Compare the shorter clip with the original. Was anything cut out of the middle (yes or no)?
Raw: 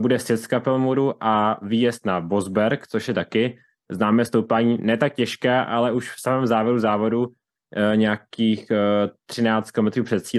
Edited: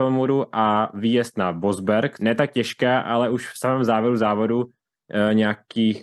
yes